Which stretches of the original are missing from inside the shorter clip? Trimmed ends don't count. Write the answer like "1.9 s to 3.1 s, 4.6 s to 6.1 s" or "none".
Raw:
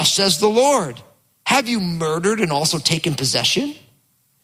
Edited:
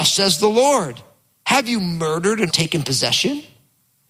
2.5 s to 2.8 s